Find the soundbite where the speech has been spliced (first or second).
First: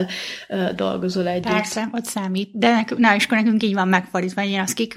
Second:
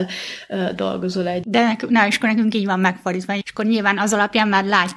second